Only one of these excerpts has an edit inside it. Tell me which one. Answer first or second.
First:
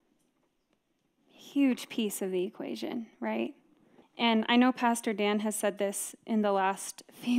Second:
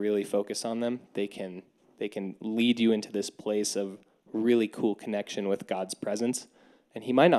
first